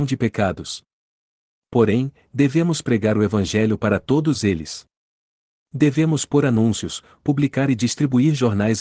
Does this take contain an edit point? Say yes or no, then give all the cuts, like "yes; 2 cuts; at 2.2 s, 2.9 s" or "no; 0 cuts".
no; 0 cuts